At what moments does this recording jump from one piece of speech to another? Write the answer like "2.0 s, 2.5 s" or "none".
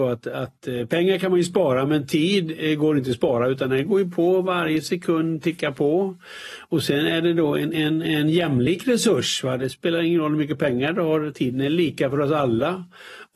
none